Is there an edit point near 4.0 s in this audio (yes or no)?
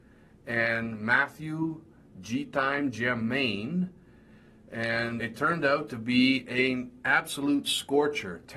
no